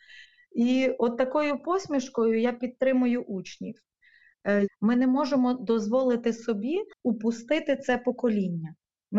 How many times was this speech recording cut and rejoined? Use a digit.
2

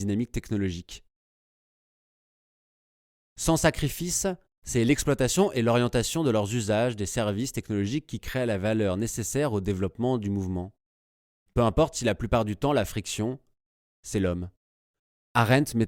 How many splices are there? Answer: 1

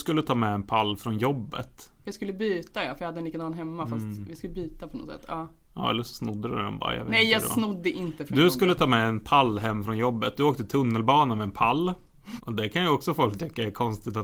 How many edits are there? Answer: 1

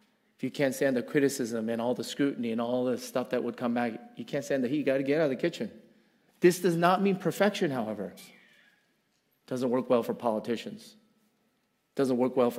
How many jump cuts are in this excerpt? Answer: 2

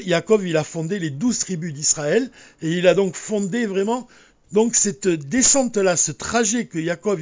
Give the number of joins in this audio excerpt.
1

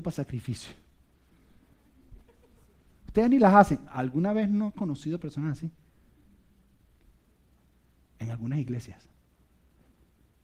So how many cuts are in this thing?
1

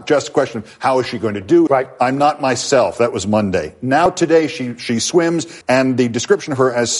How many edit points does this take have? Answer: 2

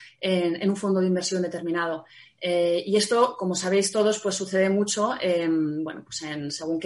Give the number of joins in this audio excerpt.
0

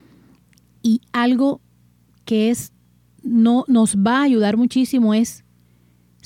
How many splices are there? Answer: 0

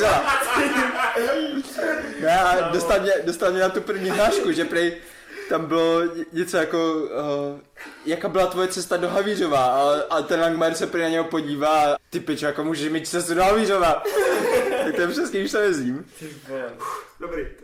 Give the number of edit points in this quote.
2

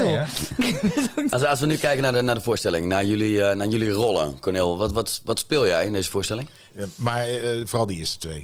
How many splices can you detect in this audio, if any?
1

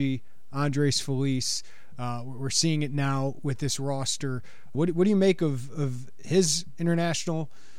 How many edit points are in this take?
1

